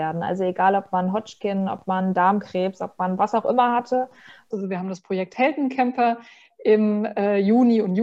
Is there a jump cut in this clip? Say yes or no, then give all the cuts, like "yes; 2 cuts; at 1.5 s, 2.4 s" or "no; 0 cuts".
yes; 1 cut; at 4.5 s